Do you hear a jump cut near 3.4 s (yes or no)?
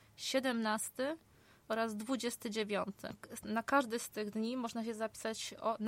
no